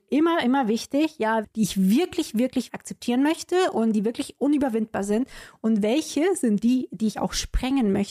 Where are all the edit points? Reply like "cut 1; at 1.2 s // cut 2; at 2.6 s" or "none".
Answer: cut 1; at 1.4 s // cut 2; at 2.7 s